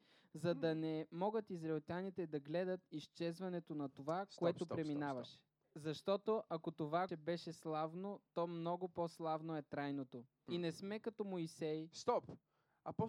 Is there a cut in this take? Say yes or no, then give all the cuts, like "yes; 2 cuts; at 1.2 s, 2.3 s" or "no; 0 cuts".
yes; 3 cuts; at 5.6 s, 7.1 s, 10.5 s